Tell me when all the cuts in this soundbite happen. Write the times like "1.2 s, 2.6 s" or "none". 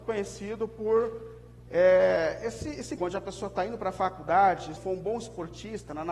3.0 s, 4.8 s